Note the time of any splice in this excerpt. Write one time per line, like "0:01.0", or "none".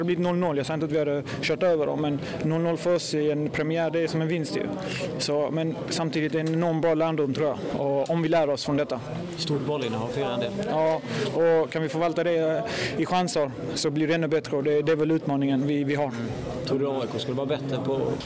none